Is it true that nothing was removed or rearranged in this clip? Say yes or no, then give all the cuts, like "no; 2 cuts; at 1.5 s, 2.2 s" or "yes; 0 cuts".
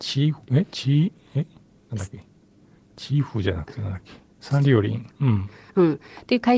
no; 1 cut; at 5.1 s